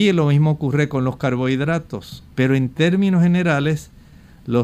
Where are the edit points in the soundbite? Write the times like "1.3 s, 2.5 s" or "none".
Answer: 2.3 s